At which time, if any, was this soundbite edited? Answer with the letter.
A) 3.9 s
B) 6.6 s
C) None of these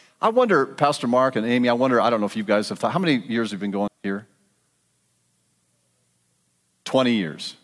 A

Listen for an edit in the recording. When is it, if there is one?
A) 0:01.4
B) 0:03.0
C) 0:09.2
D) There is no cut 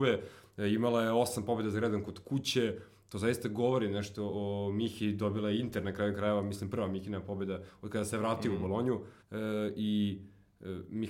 C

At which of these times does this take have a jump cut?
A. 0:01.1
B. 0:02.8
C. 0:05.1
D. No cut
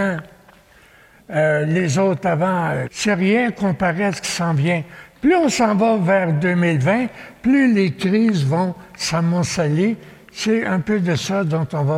B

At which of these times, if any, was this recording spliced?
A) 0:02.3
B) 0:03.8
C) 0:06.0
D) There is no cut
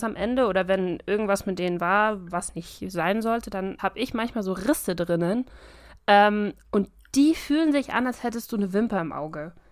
B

